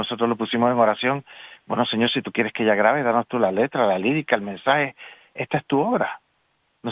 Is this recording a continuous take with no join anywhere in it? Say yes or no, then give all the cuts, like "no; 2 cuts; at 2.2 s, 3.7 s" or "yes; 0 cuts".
yes; 0 cuts